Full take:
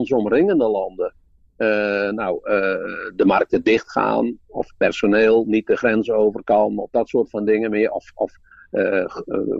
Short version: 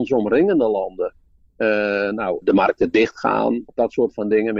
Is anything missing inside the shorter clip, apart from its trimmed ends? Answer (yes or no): yes